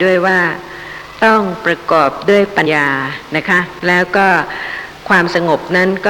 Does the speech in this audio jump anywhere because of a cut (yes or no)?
yes